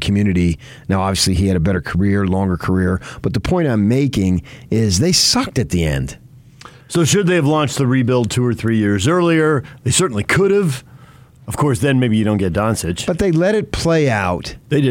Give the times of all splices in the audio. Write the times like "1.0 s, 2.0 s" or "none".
none